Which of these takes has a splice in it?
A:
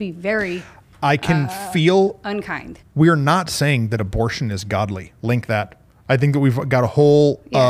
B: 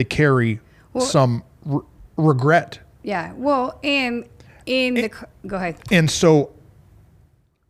A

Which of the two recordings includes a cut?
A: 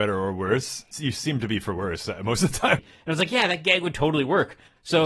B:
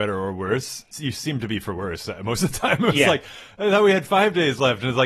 A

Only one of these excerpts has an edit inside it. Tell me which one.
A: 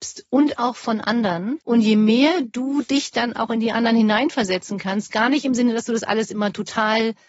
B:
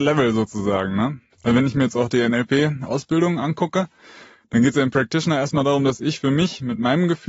A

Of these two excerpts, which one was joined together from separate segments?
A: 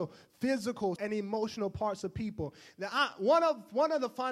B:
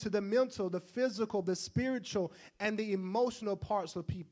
A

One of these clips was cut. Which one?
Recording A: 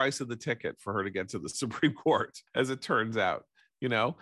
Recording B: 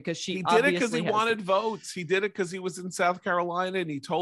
A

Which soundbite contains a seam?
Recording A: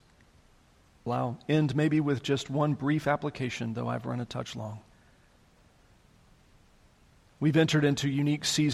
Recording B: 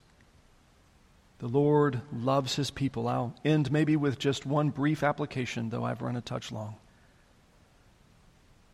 A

